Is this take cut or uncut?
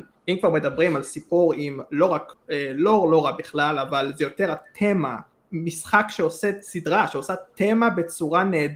uncut